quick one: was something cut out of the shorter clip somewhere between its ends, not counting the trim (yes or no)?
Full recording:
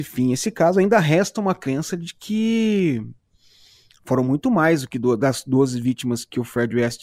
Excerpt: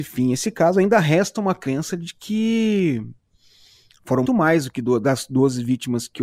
yes